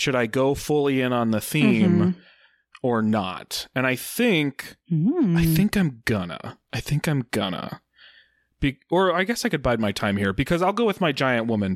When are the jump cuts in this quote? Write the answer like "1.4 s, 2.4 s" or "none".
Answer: none